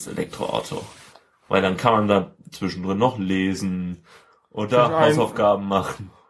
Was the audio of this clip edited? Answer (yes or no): no